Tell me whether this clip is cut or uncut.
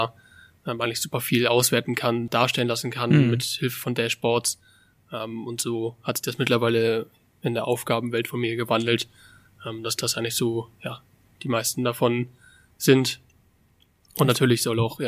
cut